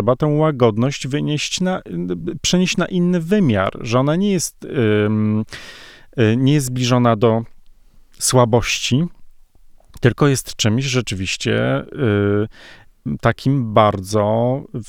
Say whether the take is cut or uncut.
uncut